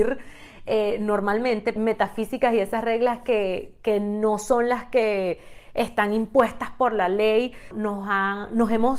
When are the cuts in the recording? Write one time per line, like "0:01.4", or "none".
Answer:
0:01.8
0:07.7

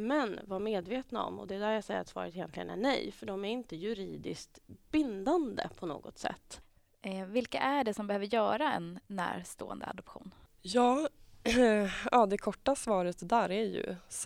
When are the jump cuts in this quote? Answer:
none

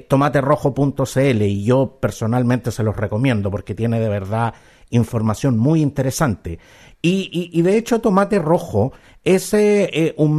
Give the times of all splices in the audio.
0:06.9

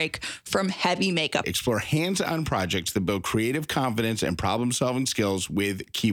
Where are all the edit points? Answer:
0:01.4

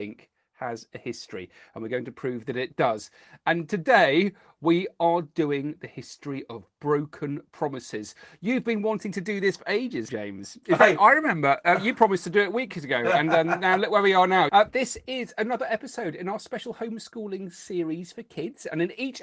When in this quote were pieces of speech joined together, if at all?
0:10.1
0:14.5

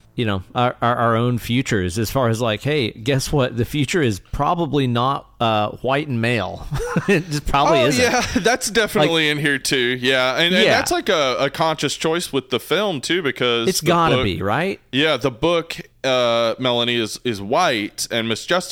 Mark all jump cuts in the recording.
none

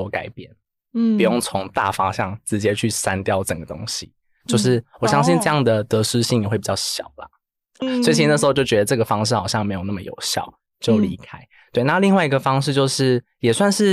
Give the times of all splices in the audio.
0:07.8

